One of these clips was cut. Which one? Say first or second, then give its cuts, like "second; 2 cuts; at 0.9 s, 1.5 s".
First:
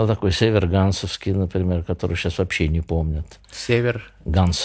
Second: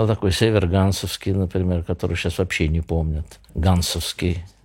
second; 1 cut; at 3.5 s